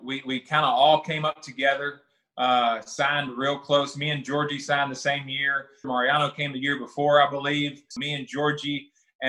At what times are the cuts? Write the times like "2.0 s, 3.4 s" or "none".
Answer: 5.8 s, 7.9 s